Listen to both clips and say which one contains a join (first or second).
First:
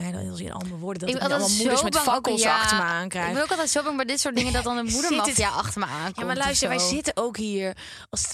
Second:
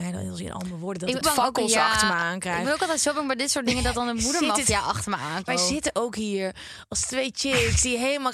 second